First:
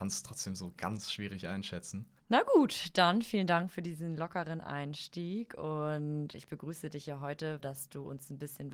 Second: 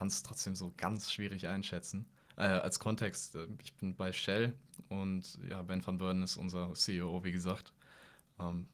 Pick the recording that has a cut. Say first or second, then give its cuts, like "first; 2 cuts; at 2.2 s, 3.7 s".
first; 3 cuts; at 2.2 s, 6.3 s, 7.6 s